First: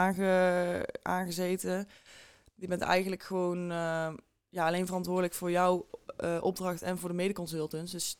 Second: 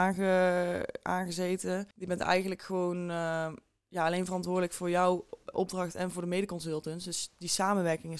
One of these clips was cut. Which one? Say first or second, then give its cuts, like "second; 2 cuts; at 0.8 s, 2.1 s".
second; 2 cuts; at 1.9 s, 5.5 s